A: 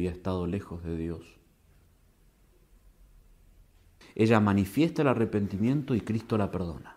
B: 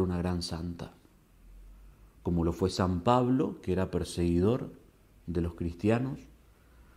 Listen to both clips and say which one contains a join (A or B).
A